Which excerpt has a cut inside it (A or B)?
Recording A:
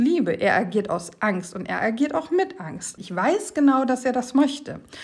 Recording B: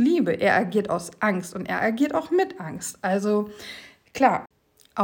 A